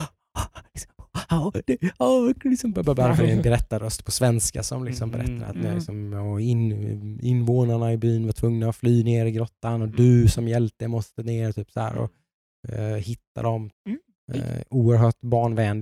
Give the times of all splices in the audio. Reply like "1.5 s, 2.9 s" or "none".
13.7 s